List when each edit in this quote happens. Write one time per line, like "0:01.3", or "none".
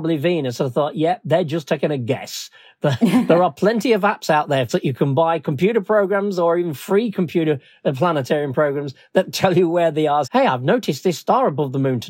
0:04.7
0:10.2